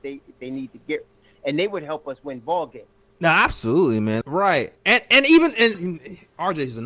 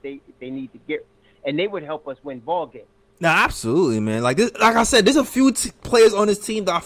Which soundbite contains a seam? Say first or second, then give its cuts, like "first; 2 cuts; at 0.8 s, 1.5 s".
first; 2 cuts; at 4.2 s, 5.7 s